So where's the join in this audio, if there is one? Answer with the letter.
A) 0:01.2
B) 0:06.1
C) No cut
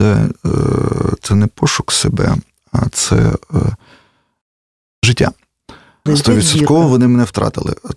B